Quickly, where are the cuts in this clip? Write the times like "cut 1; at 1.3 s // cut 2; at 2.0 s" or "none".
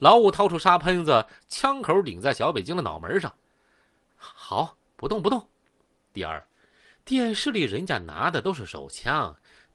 cut 1; at 1.4 s // cut 2; at 6.0 s

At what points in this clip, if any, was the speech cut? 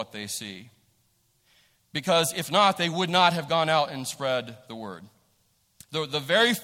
none

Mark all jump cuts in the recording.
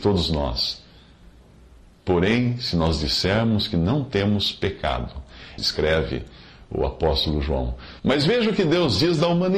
cut 1; at 5.6 s // cut 2; at 8.0 s

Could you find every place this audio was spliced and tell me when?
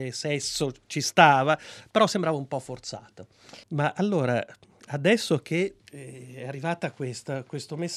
cut 1; at 3.6 s // cut 2; at 5.8 s

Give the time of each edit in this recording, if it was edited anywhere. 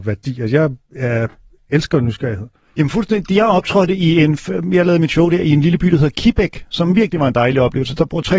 none

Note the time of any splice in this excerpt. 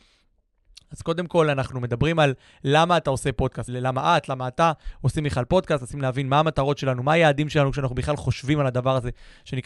cut 1; at 3.7 s

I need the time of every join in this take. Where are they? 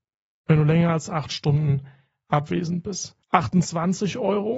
cut 1; at 3.2 s

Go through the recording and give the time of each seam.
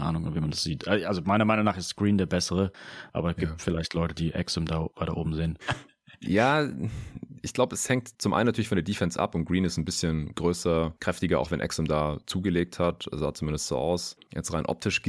cut 1; at 5.6 s

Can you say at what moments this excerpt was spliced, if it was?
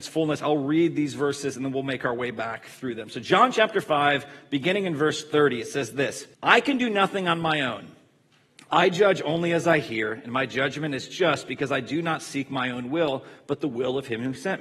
cut 1; at 6.3 s

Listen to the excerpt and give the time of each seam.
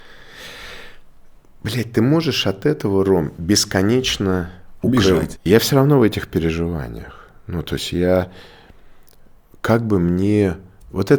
cut 1; at 5.4 s

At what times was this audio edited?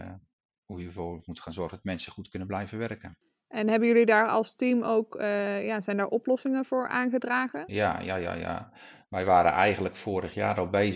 none

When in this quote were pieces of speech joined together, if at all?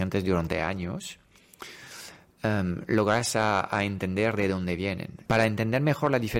cut 1; at 5.2 s

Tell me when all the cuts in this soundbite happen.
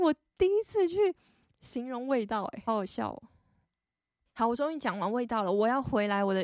cut 1; at 2.7 s

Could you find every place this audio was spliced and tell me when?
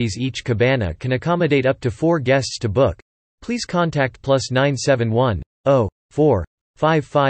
none

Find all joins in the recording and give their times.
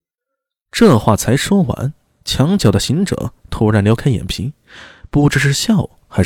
none

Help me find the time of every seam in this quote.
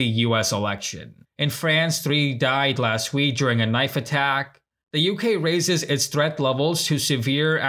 cut 1; at 1.3 s // cut 2; at 4.8 s

